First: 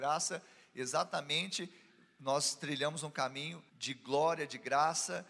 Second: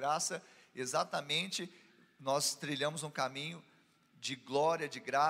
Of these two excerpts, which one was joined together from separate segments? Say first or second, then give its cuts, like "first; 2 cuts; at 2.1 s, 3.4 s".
first; 1 cut; at 3.7 s